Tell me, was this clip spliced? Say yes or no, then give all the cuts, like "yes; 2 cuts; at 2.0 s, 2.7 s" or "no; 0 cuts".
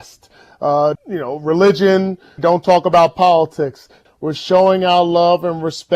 yes; 3 cuts; at 1.0 s, 2.4 s, 4.1 s